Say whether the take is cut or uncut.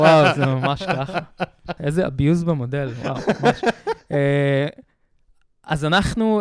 cut